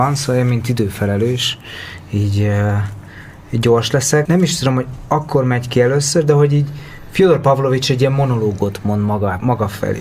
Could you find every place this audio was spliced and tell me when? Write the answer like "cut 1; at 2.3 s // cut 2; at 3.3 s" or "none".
cut 1; at 4.3 s